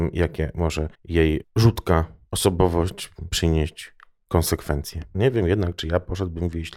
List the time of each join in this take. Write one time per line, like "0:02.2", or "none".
0:00.9
0:05.1